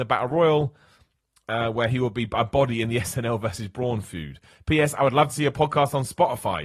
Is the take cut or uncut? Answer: uncut